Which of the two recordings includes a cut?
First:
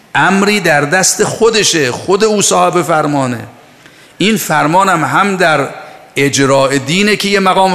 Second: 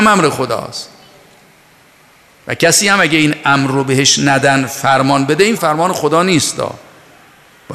second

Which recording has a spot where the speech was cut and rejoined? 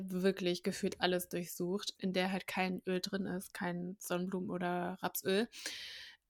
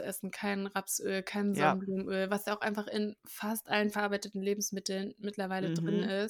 first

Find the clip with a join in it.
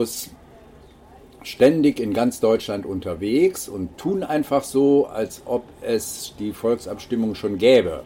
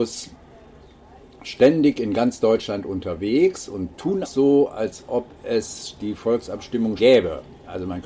second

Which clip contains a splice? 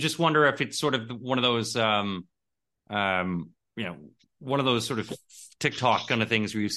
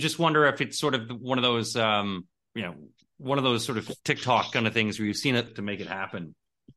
second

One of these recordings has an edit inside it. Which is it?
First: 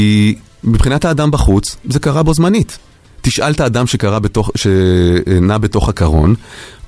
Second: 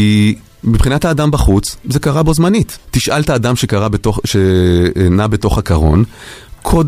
second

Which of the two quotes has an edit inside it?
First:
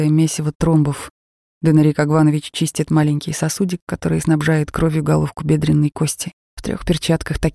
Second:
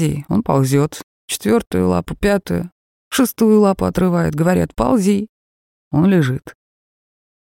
first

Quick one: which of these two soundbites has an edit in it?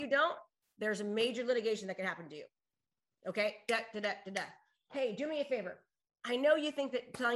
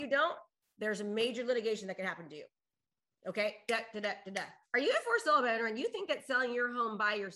second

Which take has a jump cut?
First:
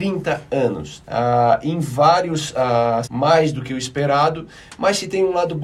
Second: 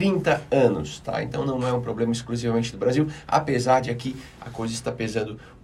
first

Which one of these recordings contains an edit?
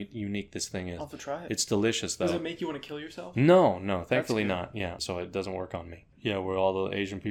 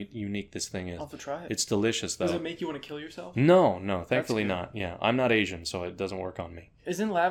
first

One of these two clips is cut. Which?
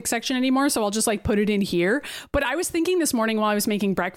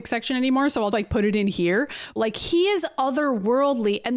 second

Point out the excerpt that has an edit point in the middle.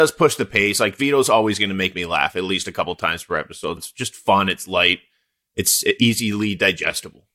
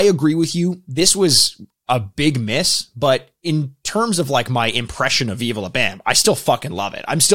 first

